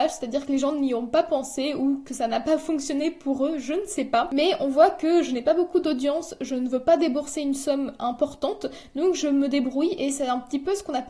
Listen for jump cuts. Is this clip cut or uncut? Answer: uncut